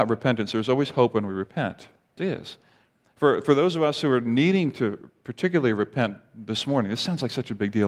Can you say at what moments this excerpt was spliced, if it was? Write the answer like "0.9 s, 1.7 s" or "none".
2.2 s